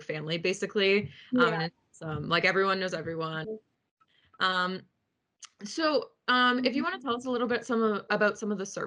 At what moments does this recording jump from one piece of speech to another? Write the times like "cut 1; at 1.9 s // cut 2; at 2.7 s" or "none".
cut 1; at 3.4 s